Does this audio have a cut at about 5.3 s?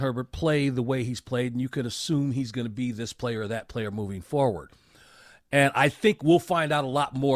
no; 0 cuts

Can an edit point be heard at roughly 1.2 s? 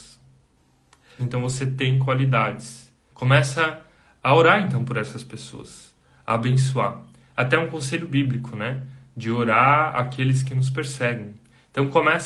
yes; 2 cuts; at 1.2 s, 3.1 s

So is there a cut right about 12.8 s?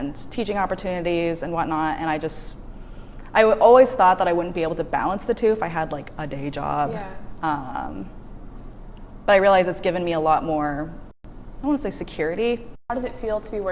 yes; 1 cut; at 12.8 s

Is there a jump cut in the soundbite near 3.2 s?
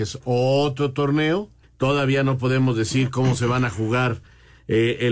no; 1 cut; at 1.6 s

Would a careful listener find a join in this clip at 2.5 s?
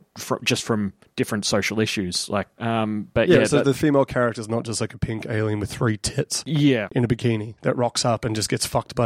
yes; 1 cut; at 2.5 s

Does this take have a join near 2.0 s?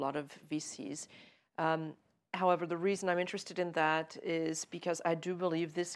no; 0 cuts

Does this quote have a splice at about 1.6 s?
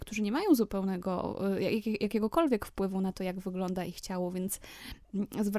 no; 0 cuts

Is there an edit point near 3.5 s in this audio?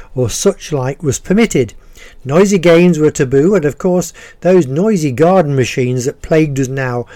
no; 0 cuts

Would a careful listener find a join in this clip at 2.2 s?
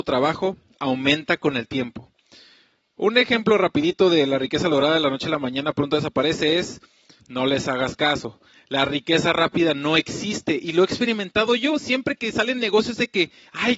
no; 1 cut; at 7.2 s

